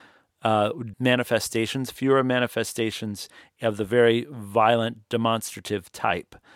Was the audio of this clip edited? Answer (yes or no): yes